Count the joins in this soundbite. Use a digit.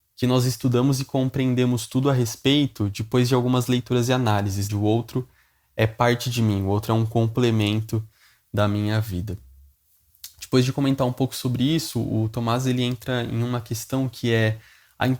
1